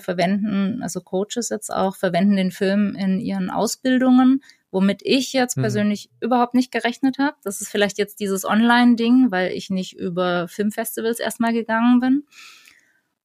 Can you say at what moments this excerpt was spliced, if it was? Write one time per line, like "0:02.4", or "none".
none